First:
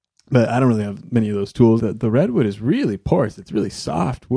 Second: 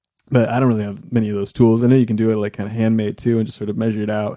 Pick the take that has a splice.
first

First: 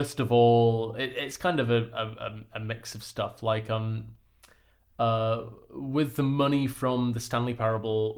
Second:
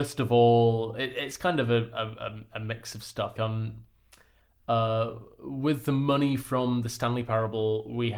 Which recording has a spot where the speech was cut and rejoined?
second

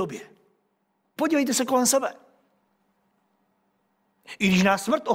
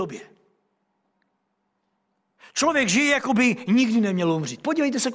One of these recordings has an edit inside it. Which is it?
first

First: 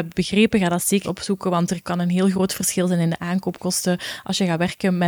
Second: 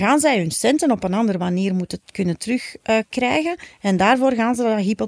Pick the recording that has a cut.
first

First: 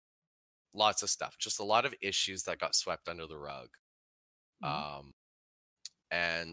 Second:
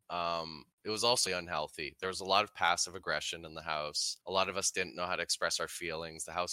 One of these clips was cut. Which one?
second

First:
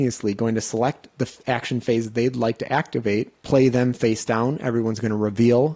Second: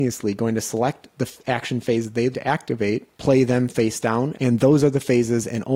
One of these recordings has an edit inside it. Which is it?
second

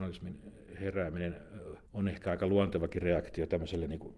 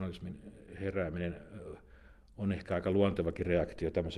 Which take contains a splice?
first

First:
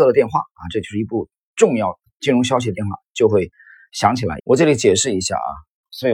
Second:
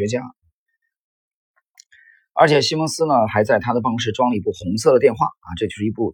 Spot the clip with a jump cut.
first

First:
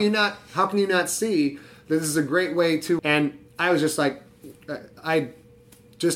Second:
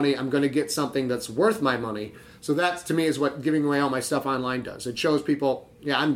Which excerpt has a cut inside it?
first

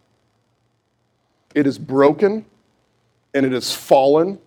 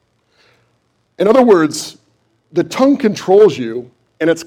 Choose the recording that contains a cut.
first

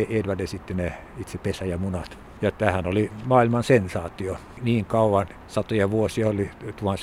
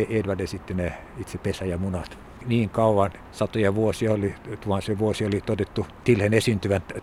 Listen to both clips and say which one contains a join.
second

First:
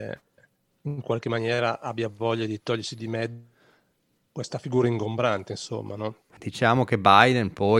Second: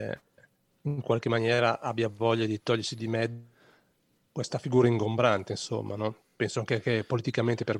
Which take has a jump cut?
first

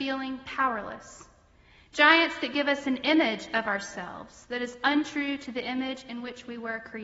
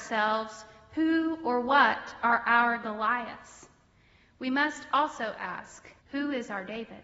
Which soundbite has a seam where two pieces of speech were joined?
second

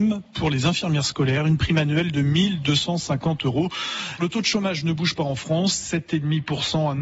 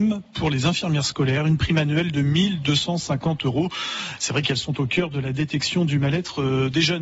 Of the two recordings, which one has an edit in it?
first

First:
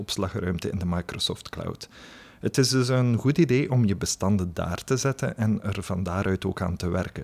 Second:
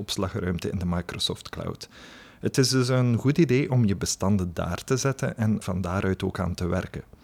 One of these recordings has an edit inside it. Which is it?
second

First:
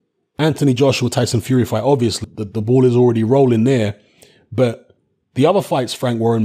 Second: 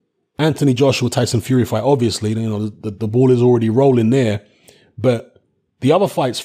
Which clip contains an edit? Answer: first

